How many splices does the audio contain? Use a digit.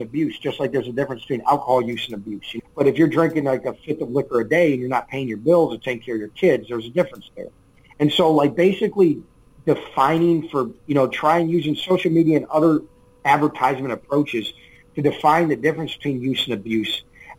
1